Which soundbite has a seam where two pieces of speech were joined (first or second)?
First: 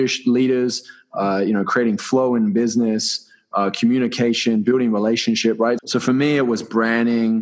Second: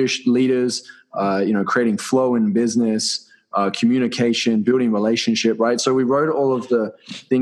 first